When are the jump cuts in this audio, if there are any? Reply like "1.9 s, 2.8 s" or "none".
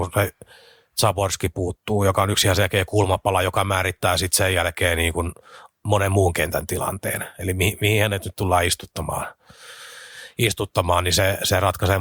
none

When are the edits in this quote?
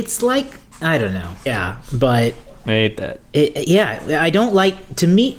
1.5 s

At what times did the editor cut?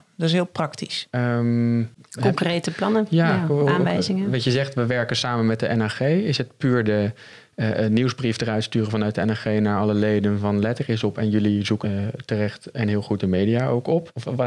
1.1 s, 11.8 s

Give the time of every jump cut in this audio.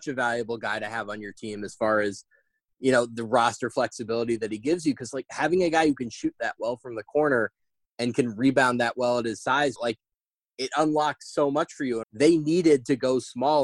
9.8 s, 12.0 s

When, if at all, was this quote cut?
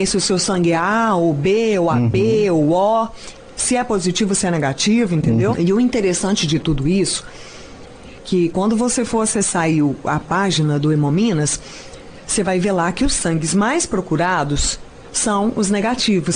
5.5 s

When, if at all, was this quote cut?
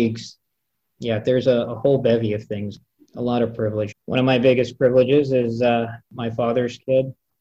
3.9 s, 6.0 s

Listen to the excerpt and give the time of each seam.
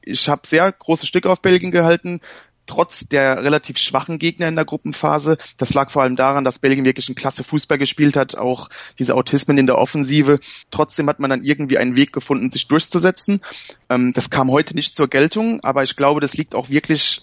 10.6 s, 13.8 s

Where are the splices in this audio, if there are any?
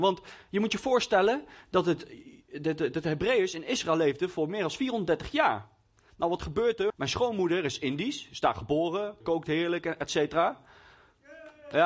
6.9 s, 9.2 s

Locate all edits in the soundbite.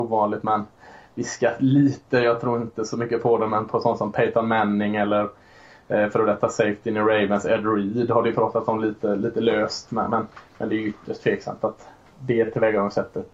none

